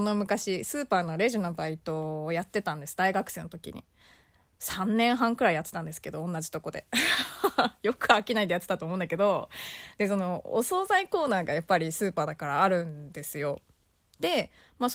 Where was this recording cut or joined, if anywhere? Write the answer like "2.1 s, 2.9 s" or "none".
none